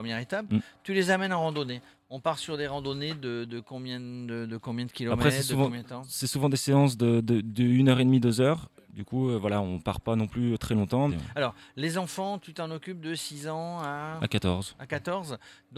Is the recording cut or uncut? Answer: cut